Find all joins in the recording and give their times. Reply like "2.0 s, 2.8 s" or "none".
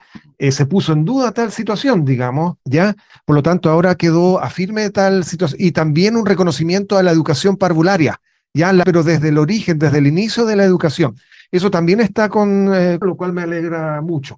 8.8 s, 13.0 s